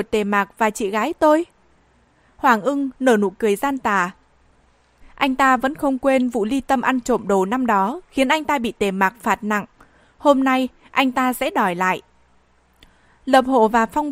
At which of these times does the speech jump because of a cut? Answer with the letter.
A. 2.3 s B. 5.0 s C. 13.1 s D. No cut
B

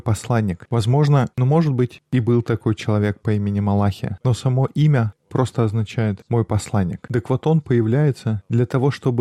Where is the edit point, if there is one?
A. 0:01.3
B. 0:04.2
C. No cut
A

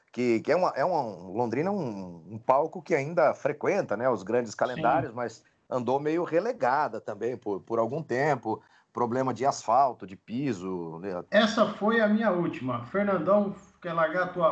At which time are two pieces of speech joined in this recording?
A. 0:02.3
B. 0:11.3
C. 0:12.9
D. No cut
B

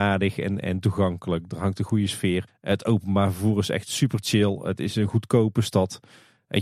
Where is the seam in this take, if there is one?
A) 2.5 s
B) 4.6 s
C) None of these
A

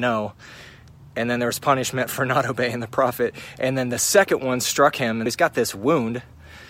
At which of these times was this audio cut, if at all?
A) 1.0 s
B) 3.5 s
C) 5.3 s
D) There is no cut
C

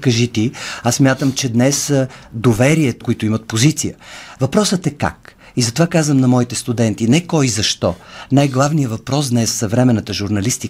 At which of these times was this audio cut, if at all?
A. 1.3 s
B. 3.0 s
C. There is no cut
B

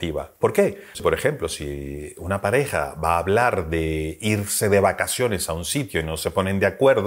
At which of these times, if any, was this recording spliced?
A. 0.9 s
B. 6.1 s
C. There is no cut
A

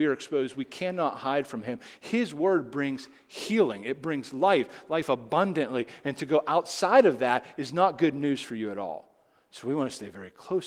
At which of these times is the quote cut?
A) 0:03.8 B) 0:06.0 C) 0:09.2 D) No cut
D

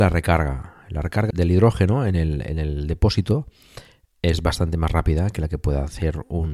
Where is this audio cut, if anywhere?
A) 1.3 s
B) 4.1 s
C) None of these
A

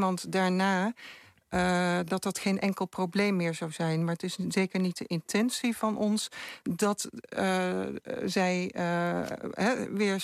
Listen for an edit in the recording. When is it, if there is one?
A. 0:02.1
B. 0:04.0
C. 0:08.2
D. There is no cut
D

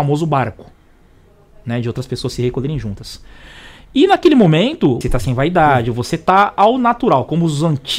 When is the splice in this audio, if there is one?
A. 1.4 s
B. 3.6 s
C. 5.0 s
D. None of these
C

